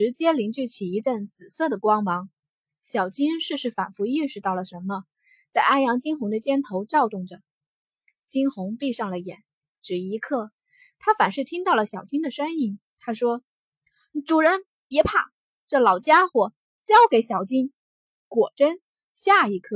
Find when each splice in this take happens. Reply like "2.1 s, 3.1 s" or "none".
12.9 s, 17.8 s